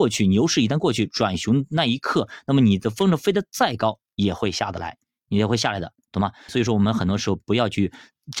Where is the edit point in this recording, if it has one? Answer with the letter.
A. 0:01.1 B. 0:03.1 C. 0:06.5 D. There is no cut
C